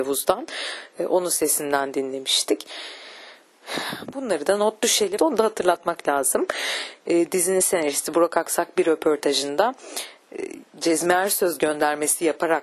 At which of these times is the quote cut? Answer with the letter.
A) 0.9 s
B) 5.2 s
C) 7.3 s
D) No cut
B